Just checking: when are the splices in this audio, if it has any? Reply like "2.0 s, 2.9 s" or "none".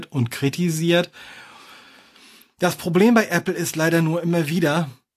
none